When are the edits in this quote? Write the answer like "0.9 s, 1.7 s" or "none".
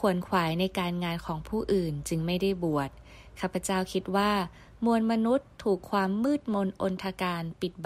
none